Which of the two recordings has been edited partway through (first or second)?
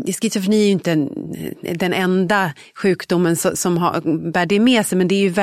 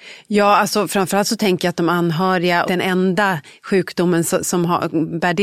second